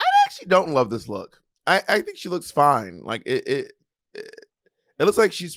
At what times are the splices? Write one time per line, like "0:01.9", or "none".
none

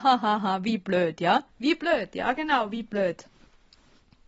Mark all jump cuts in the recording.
0:01.5

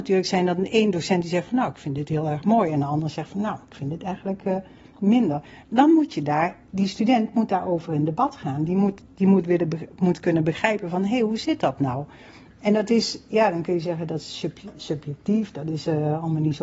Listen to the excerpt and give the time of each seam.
none

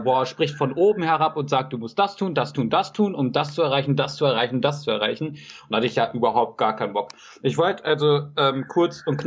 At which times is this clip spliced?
none

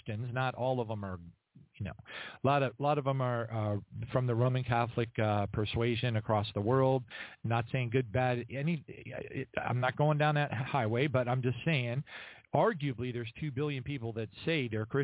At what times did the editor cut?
none

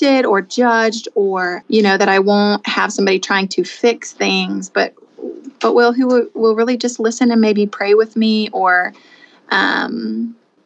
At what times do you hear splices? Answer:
0:01.6

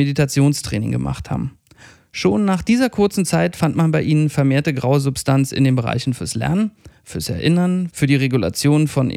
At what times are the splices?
none

